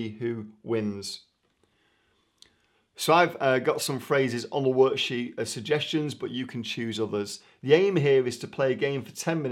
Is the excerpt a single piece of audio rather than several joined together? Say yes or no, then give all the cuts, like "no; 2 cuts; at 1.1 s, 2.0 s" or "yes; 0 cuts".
yes; 0 cuts